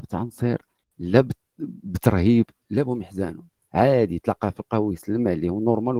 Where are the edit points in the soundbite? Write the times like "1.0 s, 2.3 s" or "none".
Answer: none